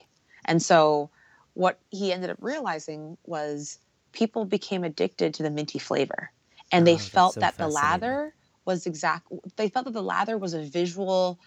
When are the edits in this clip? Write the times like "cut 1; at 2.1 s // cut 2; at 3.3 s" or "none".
none